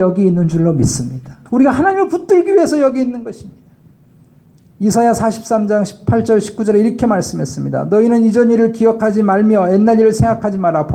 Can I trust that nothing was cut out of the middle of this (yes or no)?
no